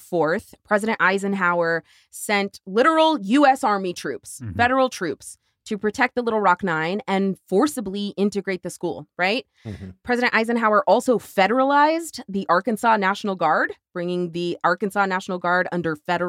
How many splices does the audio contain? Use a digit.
0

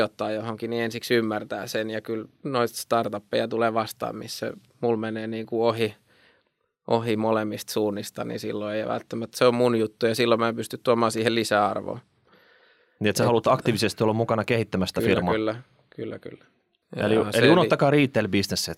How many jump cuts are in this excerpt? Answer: 1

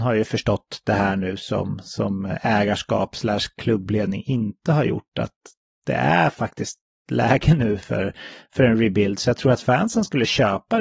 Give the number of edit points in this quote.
0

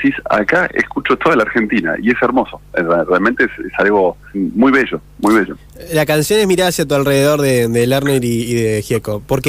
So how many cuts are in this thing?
1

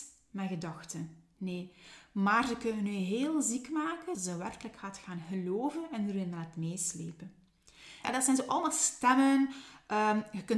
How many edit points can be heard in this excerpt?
2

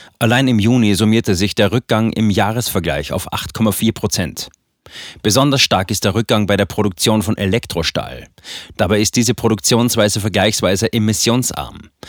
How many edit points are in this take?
1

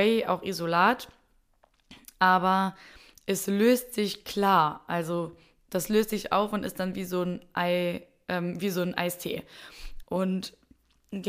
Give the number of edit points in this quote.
1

